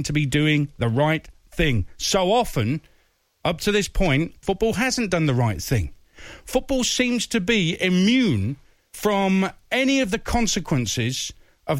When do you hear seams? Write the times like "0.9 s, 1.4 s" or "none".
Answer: 4.4 s